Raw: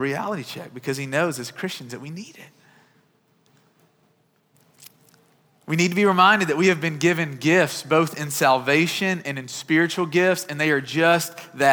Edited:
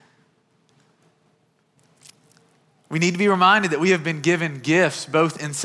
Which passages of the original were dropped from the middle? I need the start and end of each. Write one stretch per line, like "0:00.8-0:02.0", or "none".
none